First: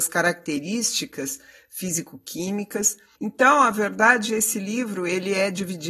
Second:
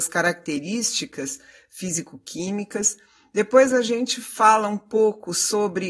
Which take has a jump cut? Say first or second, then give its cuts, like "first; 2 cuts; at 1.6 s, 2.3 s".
first; 1 cut; at 3.2 s